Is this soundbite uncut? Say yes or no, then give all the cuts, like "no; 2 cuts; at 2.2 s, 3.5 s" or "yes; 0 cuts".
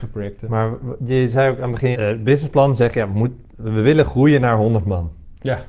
no; 1 cut; at 1.9 s